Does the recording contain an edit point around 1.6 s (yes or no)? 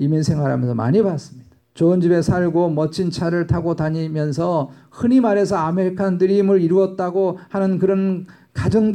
yes